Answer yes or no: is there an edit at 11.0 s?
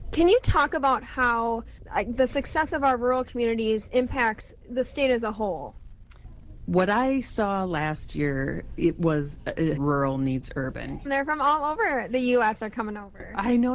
yes